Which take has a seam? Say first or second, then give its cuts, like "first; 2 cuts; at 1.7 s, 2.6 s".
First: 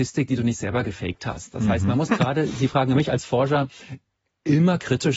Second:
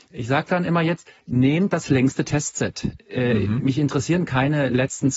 first; 1 cut; at 2.1 s